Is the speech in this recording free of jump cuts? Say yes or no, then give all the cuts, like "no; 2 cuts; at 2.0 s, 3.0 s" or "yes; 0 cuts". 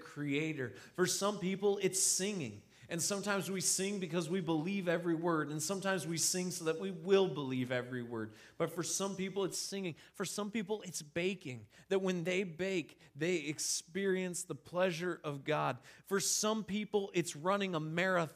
yes; 0 cuts